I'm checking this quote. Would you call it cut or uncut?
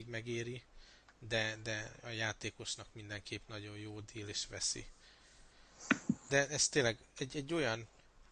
cut